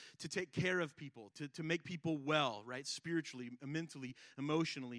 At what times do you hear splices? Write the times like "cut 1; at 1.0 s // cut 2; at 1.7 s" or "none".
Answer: cut 1; at 1.3 s